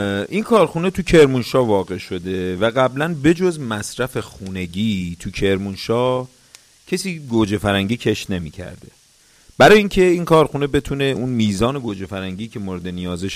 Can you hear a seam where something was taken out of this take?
no; 0 cuts

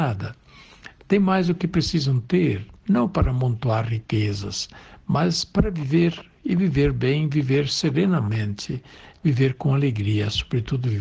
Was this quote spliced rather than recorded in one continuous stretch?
no; 0 cuts

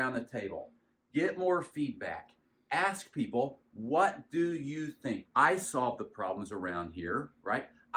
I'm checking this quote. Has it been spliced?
yes; 1 cut; at 5.2 s

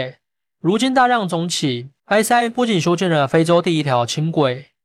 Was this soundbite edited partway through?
yes; 1 cut; at 2.0 s

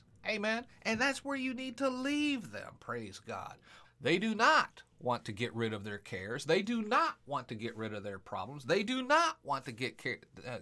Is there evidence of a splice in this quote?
yes; 1 cut; at 3.8 s

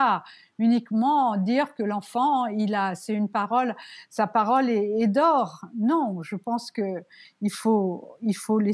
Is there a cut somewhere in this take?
no; 0 cuts

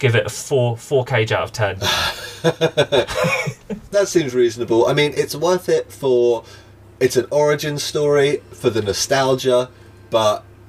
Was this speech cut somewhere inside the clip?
yes; 1 cut; at 5.1 s

